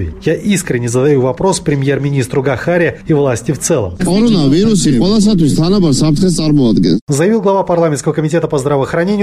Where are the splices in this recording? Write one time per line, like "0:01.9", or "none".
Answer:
0:04.0